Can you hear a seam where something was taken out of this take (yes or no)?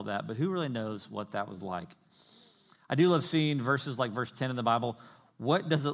no